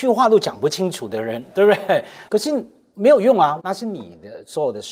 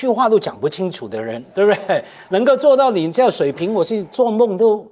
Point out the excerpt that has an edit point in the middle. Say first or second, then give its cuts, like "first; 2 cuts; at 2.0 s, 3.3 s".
first; 2 cuts; at 2.3 s, 3.6 s